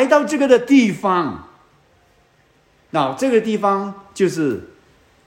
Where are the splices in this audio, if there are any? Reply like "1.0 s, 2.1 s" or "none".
none